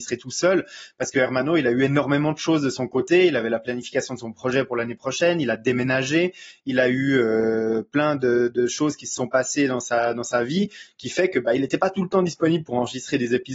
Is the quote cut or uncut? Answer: uncut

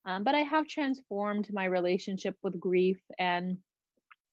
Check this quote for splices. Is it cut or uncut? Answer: uncut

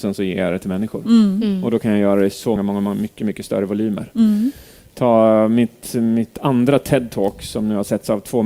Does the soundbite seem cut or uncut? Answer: cut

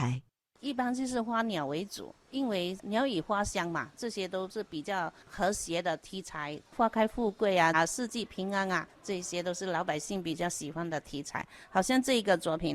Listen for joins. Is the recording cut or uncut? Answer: cut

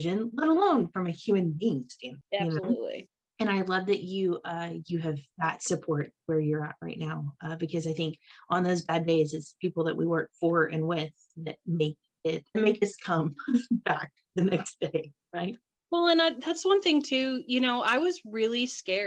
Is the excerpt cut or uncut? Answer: uncut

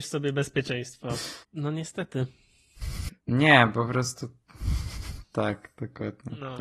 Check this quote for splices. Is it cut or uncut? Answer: cut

